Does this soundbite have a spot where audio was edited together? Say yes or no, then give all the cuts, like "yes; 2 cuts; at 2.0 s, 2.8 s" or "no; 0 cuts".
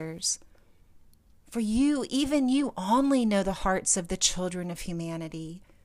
yes; 1 cut; at 1.3 s